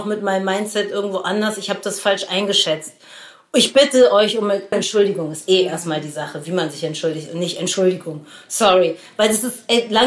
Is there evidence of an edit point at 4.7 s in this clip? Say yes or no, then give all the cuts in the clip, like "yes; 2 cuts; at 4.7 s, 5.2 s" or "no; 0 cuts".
yes; 1 cut; at 4.7 s